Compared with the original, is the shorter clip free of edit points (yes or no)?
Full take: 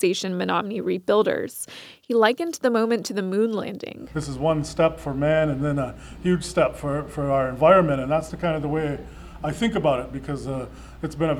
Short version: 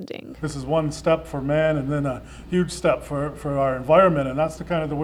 yes